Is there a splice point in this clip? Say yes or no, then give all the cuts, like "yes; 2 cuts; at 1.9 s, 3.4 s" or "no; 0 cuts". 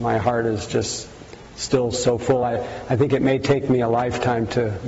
no; 0 cuts